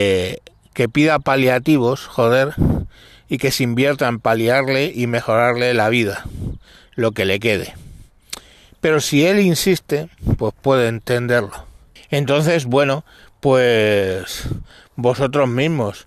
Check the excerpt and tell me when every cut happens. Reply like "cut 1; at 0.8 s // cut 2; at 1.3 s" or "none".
cut 1; at 12.0 s